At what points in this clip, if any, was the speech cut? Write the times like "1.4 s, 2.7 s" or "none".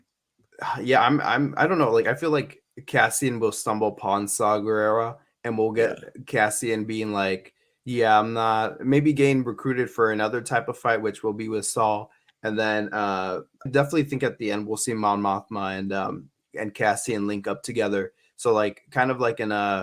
13.7 s